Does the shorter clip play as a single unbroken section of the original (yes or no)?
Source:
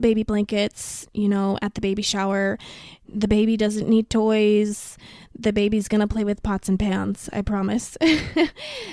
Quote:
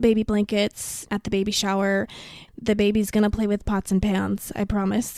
no